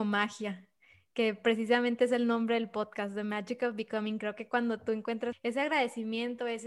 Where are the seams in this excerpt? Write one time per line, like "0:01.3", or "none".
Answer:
0:05.3

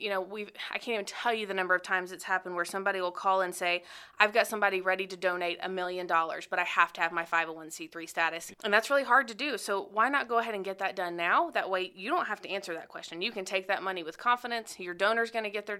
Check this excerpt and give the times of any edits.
0:08.5

